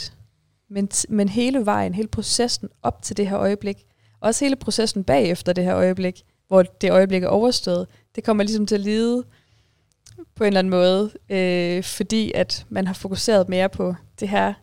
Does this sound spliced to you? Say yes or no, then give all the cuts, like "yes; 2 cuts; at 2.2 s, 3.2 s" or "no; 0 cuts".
no; 0 cuts